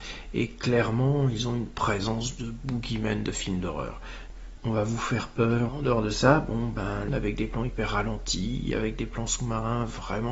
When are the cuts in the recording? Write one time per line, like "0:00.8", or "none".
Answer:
0:04.6
0:05.7
0:07.1